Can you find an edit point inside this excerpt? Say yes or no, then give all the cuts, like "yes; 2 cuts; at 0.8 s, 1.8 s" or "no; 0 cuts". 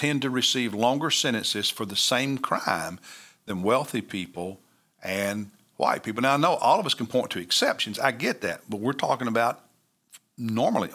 no; 0 cuts